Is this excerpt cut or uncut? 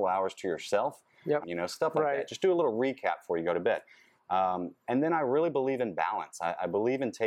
cut